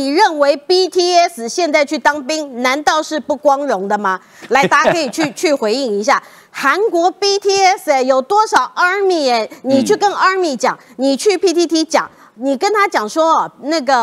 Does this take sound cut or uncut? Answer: uncut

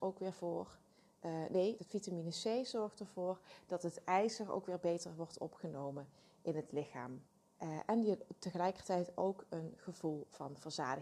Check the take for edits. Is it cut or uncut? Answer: cut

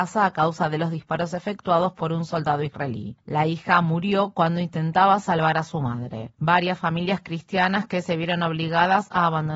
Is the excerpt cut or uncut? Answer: uncut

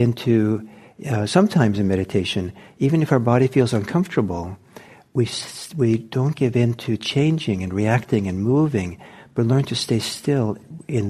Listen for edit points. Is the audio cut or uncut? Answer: uncut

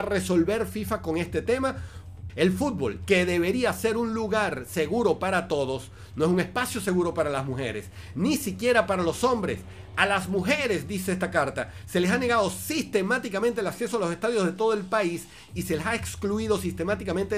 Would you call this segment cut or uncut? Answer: cut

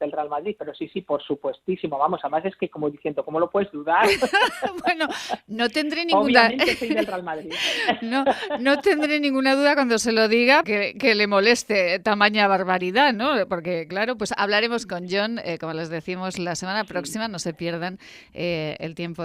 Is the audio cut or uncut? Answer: cut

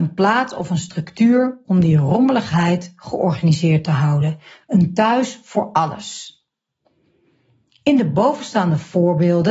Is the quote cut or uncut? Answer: uncut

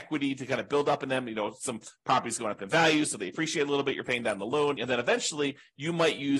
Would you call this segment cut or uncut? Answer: cut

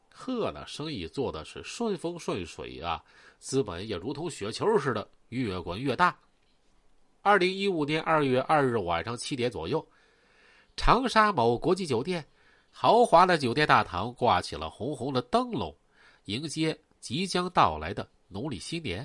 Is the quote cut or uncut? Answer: uncut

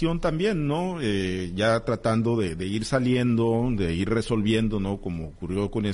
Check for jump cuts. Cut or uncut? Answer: uncut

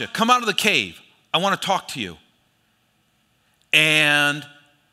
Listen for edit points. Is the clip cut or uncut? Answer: uncut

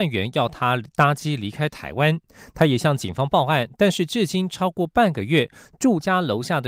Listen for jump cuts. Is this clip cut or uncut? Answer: uncut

